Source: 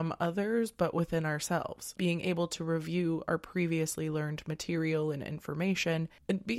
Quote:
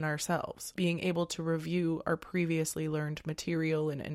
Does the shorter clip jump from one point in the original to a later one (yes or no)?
no